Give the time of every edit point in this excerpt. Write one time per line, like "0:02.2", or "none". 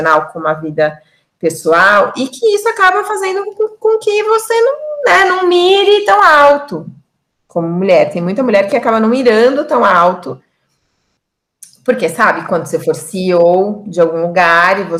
none